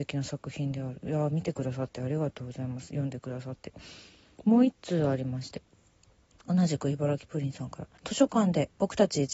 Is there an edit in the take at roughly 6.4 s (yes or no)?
no